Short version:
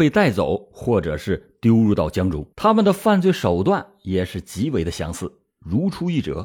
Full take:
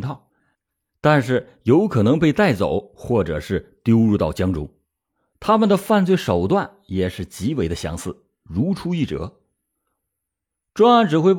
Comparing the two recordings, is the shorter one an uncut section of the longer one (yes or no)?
no